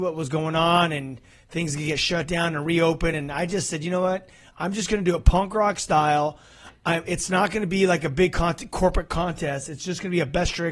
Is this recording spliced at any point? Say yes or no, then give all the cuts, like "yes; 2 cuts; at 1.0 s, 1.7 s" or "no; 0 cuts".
no; 0 cuts